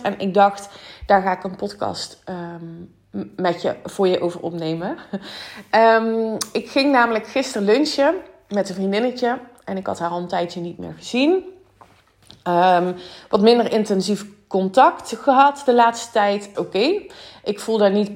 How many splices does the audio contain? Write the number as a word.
one